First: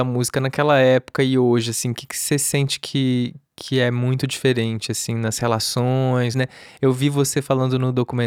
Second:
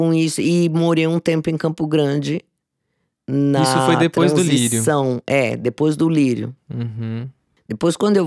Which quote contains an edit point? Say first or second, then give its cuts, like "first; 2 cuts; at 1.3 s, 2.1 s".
first; 1 cut; at 6.3 s